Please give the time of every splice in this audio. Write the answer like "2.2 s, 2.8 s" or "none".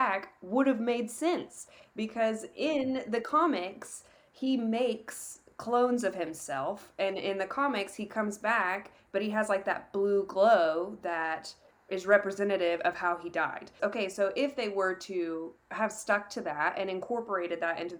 13.8 s